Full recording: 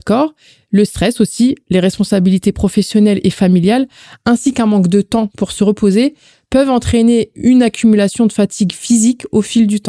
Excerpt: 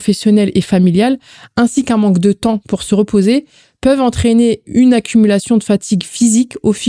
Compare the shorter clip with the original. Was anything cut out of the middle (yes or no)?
no